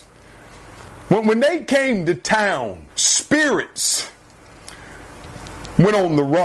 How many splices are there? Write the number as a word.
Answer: one